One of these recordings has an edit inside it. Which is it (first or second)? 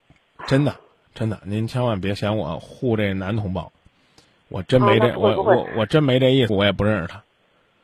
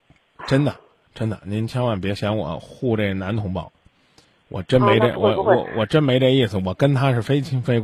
first